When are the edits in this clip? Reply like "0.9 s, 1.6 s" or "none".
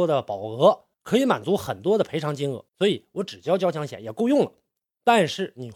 0.9 s, 2.7 s